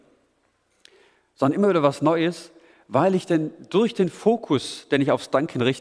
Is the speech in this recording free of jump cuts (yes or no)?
yes